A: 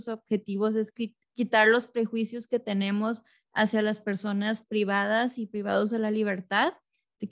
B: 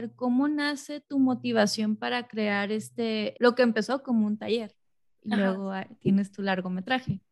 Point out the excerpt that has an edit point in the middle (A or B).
B